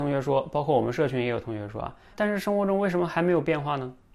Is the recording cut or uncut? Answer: cut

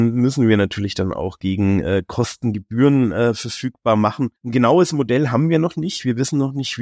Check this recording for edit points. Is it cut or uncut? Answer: cut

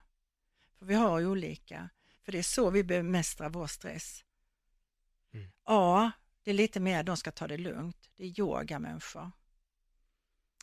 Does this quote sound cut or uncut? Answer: cut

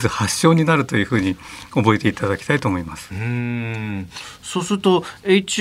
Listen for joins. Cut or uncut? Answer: uncut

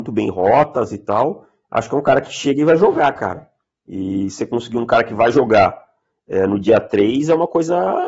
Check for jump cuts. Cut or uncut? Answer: uncut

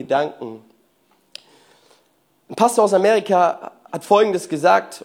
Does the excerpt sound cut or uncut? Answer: uncut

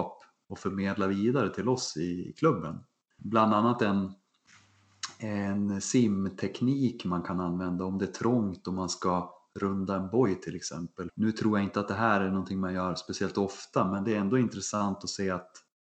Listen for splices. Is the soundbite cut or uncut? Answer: cut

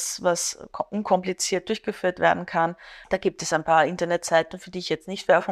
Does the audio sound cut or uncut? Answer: cut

